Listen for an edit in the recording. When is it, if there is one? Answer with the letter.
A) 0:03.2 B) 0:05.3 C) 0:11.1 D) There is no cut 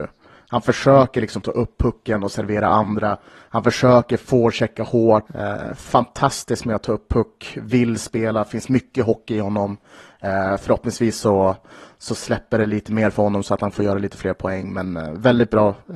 B